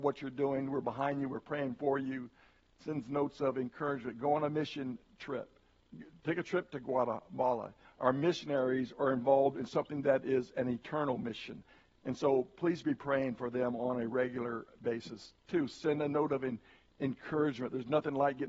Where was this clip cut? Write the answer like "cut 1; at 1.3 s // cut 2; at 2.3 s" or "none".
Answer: cut 1; at 7.8 s